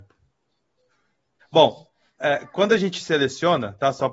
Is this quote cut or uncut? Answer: cut